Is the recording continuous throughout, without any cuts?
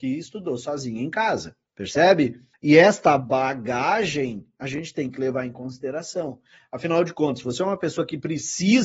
yes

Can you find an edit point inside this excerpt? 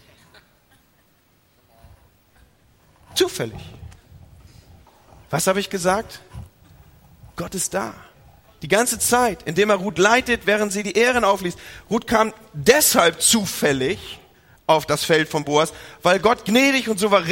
no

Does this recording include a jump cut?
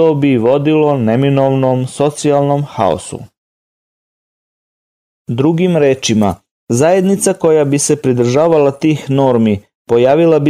no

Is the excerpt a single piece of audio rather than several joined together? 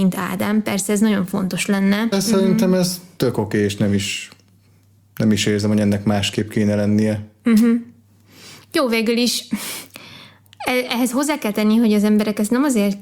no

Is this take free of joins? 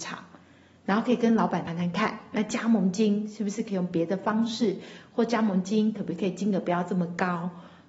no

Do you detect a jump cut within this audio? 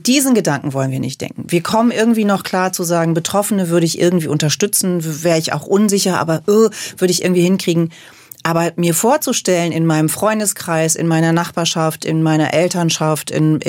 no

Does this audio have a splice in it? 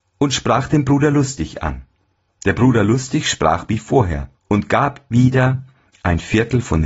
yes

